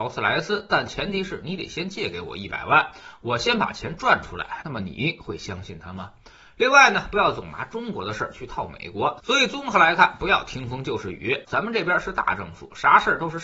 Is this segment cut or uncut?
cut